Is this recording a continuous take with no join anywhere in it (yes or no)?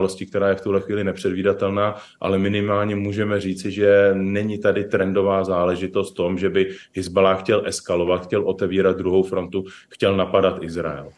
yes